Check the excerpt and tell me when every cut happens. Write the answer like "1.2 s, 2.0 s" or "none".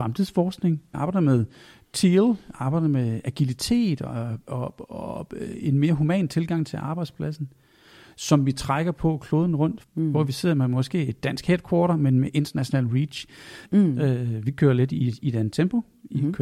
0.9 s, 9.8 s, 13.6 s